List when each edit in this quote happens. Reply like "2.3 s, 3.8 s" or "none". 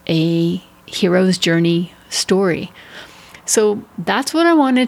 none